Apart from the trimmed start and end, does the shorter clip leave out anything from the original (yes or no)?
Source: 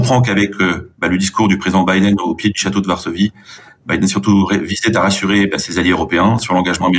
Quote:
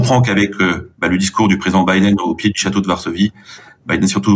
no